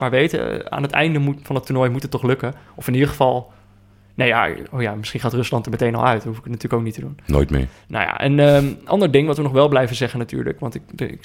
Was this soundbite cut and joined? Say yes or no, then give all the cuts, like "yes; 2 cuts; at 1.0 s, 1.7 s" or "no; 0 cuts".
no; 0 cuts